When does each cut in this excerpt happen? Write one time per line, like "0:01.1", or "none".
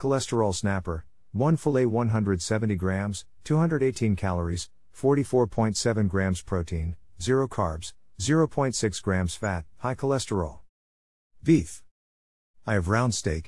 none